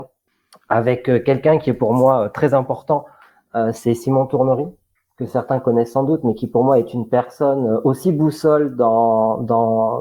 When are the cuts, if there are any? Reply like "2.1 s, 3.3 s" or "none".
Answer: none